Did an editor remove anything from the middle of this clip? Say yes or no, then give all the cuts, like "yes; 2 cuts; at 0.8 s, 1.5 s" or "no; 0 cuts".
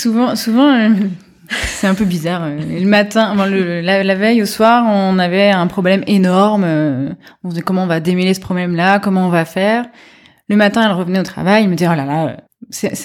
no; 0 cuts